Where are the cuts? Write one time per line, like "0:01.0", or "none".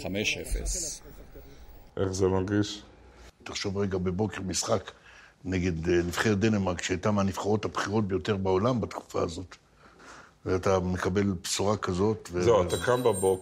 0:03.4